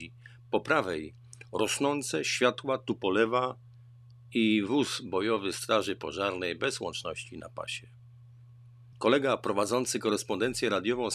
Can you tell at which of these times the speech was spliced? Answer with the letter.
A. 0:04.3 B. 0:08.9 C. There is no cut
B